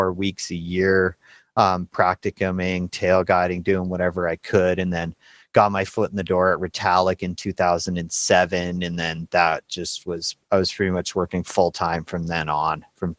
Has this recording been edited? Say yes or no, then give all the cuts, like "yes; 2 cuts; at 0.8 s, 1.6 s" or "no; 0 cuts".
no; 0 cuts